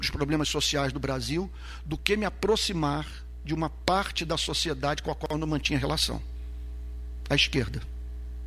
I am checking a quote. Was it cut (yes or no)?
no